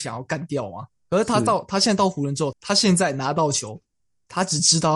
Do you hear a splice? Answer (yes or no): yes